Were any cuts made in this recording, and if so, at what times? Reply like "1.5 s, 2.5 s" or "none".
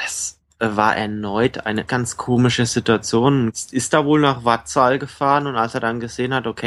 1.9 s, 3.5 s